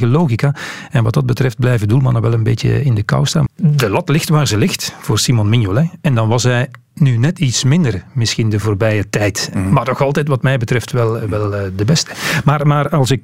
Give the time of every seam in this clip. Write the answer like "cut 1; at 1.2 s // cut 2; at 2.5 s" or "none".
cut 1; at 3.5 s

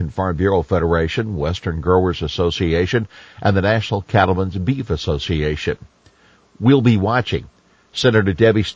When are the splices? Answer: none

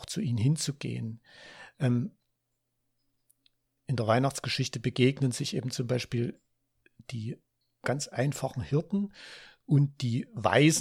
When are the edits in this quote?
none

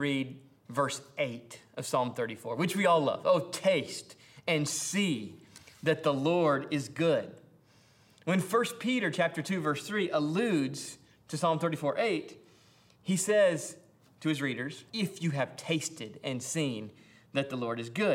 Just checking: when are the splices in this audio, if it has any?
cut 1; at 14.9 s

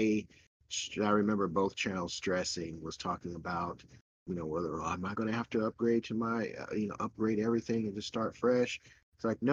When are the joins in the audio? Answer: none

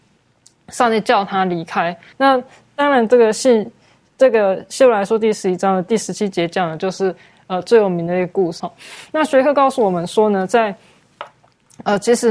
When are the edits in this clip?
cut 1; at 2.1 s // cut 2; at 8.6 s

